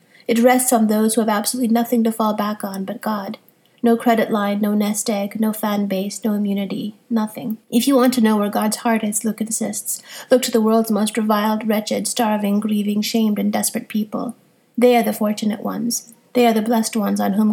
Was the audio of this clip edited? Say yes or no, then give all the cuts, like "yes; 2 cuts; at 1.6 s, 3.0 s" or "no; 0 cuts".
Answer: yes; 1 cut; at 7.6 s